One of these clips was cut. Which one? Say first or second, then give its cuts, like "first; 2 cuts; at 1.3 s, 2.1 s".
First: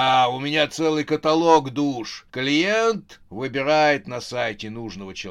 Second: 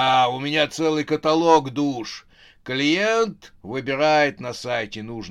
first; 1 cut; at 2.3 s